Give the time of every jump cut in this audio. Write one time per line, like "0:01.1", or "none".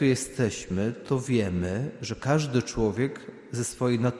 none